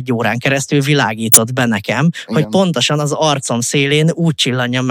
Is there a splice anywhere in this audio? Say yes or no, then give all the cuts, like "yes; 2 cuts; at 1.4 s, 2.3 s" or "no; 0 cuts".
no; 0 cuts